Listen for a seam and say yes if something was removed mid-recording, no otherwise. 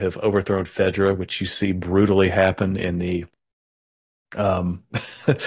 no